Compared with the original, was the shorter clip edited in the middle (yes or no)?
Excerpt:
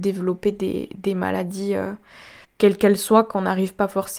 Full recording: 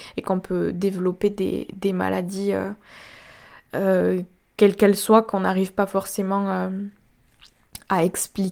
yes